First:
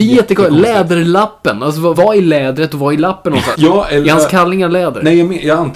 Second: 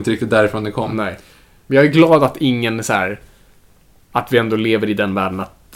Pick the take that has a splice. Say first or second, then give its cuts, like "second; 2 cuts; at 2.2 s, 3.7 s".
first; 2 cuts; at 1.9 s, 3.5 s